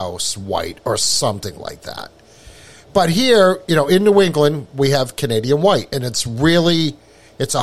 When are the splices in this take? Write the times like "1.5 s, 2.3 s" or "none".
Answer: none